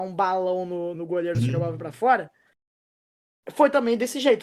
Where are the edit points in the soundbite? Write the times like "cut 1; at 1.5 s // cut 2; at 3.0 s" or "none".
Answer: cut 1; at 0.9 s

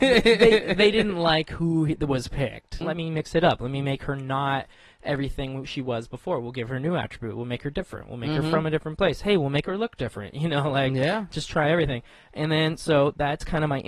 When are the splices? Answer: cut 1; at 2.8 s

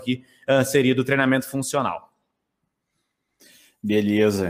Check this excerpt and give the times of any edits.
none

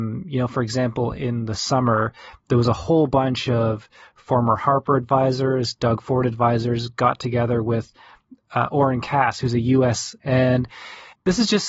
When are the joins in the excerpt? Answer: cut 1; at 10.2 s

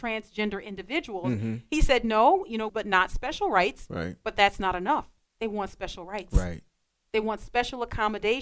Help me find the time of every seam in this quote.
cut 1; at 2.7 s // cut 2; at 5.3 s

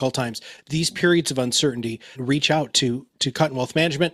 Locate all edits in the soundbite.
cut 1; at 2.1 s

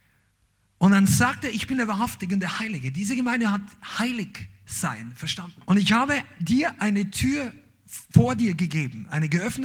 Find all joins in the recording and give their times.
cut 1; at 5.6 s

